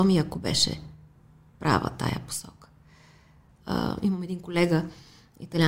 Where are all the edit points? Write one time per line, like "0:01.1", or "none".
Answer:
0:03.6